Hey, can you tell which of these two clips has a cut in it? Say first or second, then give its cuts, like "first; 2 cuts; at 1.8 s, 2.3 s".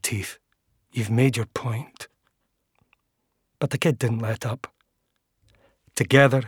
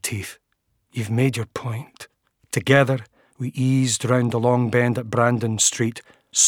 second; 1 cut; at 2.4 s